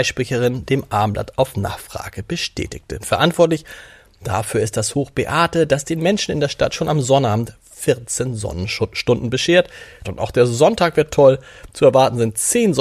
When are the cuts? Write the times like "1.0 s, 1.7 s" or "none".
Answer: 3.0 s, 10.0 s